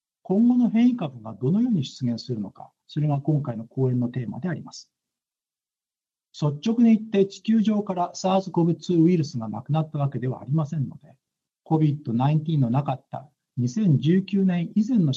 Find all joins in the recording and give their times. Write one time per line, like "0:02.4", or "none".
0:02.8